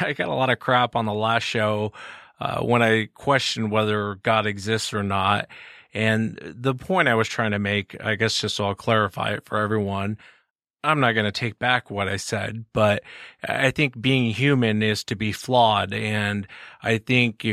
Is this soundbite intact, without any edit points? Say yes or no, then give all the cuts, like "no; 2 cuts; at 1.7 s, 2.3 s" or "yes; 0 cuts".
yes; 0 cuts